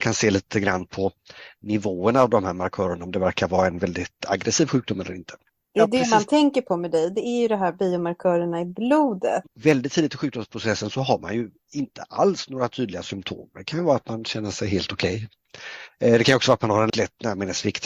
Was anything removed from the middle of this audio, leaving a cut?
yes; 2 cuts; at 9.5 s, 16.9 s

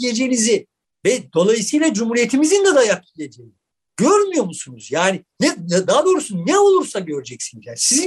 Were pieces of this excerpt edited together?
no; 0 cuts

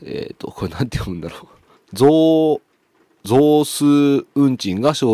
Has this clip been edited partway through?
yes; 1 cut; at 1.8 s

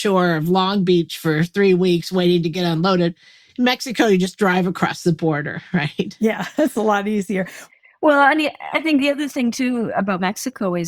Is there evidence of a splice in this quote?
no; 0 cuts

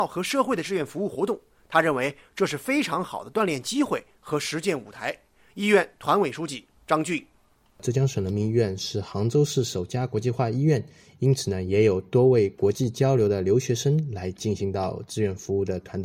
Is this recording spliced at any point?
no; 0 cuts

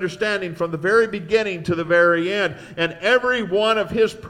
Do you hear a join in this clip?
no; 0 cuts

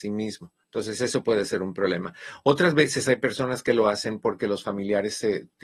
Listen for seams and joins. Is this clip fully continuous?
yes; 0 cuts

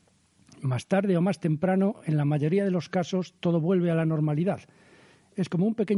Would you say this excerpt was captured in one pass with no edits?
yes; 0 cuts

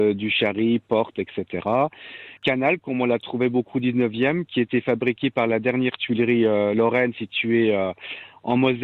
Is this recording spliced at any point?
yes; 1 cut; at 2.4 s

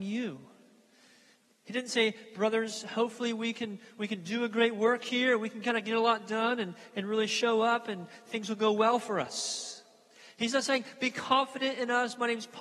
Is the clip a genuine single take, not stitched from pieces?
yes; 0 cuts

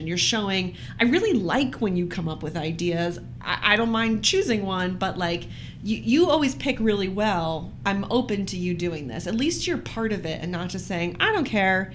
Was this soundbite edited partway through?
no; 0 cuts

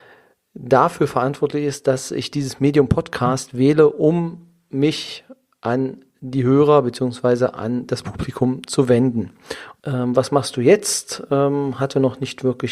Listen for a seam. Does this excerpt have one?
yes; 1 cut; at 9.8 s

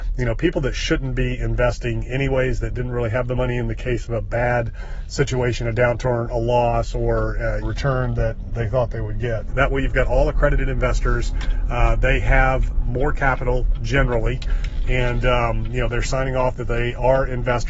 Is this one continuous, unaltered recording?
no; 2 cuts; at 7.6 s, 9.5 s

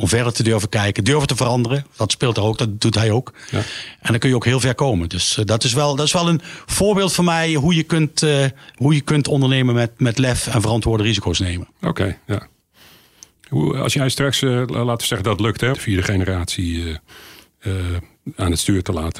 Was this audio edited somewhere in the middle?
yes; 1 cut; at 15.7 s

